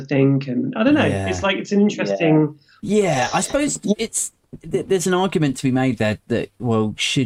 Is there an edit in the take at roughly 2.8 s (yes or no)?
yes